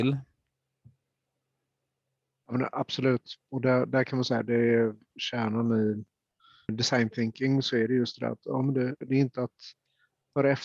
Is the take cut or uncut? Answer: cut